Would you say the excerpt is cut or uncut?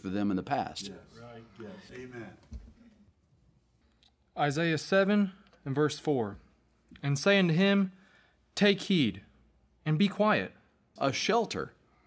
cut